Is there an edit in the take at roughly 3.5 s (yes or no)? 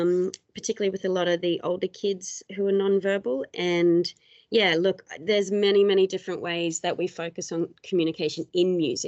no